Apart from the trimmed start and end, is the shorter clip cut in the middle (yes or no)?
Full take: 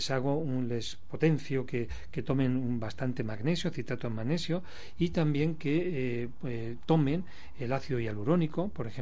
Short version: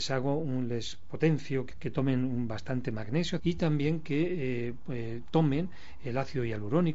yes